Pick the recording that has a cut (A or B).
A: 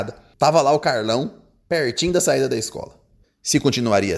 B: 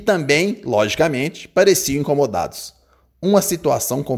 A